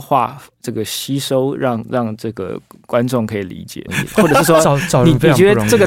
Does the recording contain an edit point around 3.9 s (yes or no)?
yes